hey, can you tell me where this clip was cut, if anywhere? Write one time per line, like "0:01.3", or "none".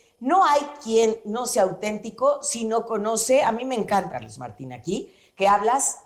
0:04.1

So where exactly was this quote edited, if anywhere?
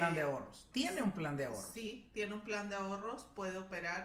none

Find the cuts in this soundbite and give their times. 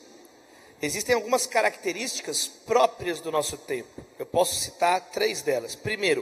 none

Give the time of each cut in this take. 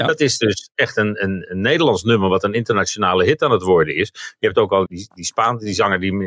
0:04.9

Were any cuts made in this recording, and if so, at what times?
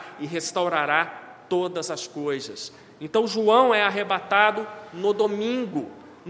none

